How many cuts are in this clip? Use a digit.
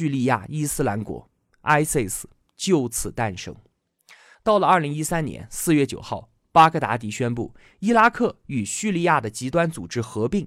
1